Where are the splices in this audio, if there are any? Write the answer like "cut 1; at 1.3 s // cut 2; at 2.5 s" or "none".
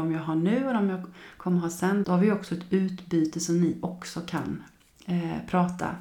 cut 1; at 2.0 s